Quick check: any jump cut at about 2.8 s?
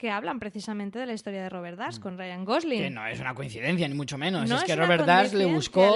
no; 0 cuts

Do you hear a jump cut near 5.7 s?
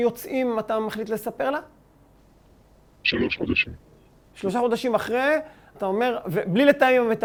yes; 1 cut; at 5.7 s

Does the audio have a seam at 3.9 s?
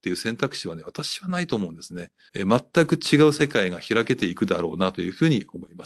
no; 1 cut; at 2.3 s

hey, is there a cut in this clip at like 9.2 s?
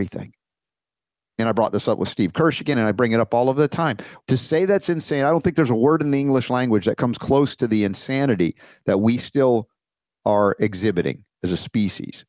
no; 1 cut; at 4.2 s

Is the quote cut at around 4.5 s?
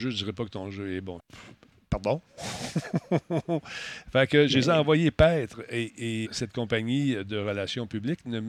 no; 2 cuts; at 1.2 s, 6.3 s

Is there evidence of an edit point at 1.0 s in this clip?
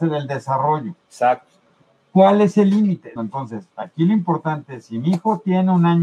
no; 1 cut; at 3.2 s

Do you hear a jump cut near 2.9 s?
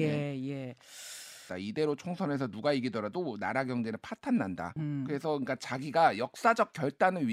no; 2 cuts; at 1.5 s, 4.8 s

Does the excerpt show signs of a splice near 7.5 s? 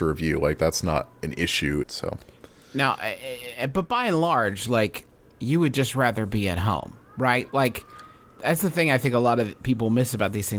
no; 1 cut; at 1.8 s

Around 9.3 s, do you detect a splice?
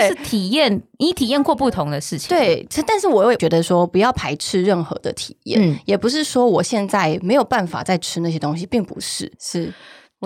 yes; 1 cut; at 9.3 s

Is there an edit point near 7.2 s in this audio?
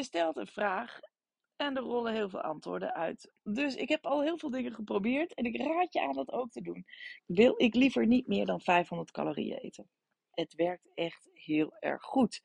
yes; 2 cuts; at 7.2 s, 10.3 s

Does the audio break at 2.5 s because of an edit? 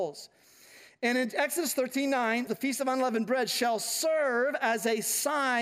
yes; 1 cut; at 2.5 s

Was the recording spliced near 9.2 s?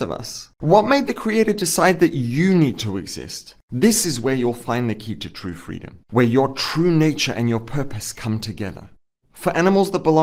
yes; 2 cuts; at 3.6 s, 9.2 s

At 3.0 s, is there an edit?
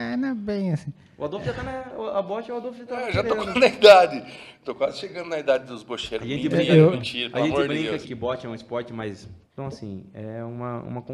no; 3 cuts; at 6.9 s, 8.0 s, 9.4 s

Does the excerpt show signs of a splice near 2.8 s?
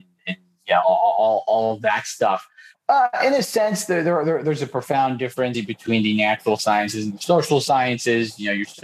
yes; 2 cuts; at 2.8 s, 5.5 s

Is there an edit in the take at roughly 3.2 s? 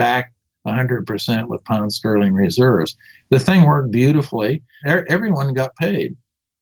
no; 1 cut; at 4.8 s

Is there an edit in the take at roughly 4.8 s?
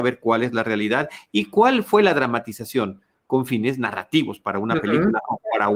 no; 0 cuts

